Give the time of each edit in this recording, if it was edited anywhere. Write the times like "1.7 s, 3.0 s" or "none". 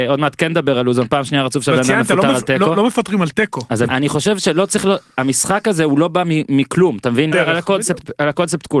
3.9 s, 7.3 s